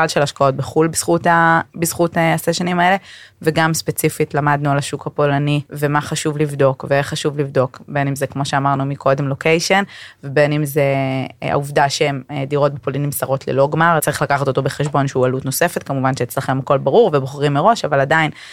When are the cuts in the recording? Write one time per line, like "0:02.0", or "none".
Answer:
0:05.7
0:14.0